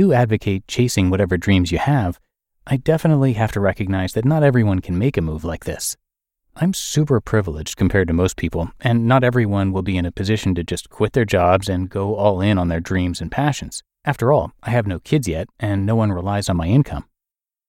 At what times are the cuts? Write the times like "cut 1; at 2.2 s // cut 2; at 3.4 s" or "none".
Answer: cut 1; at 13.9 s